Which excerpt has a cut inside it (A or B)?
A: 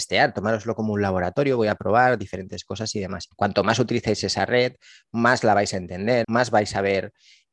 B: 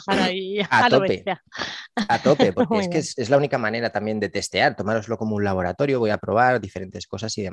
A